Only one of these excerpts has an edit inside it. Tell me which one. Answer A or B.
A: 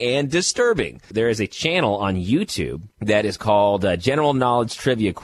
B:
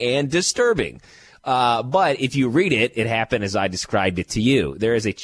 A